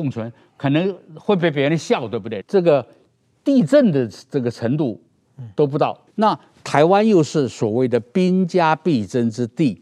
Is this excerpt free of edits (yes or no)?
no